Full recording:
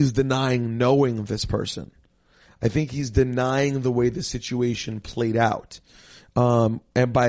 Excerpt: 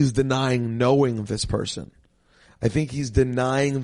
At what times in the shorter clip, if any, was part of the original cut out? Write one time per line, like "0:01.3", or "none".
none